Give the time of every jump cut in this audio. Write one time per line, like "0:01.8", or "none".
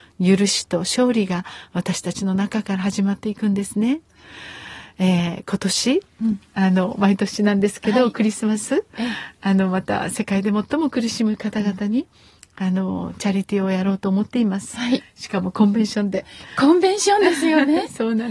none